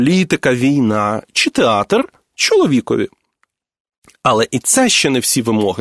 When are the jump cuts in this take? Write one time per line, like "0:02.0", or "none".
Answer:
none